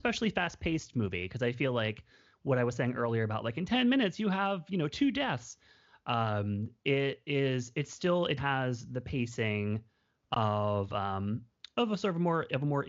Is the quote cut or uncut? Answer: cut